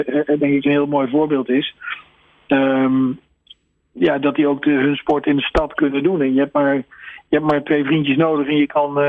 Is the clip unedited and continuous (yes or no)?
yes